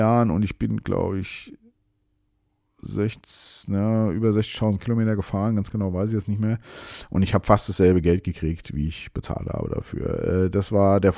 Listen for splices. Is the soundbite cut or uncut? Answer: uncut